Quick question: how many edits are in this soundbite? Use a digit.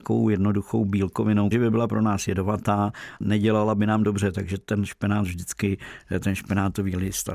2